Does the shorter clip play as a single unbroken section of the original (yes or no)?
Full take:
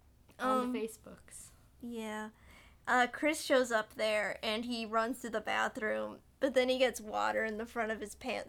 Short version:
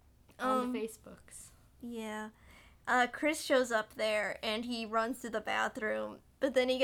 yes